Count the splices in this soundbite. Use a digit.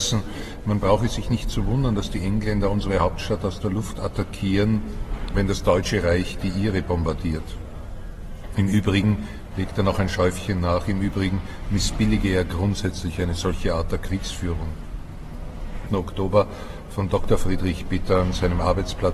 1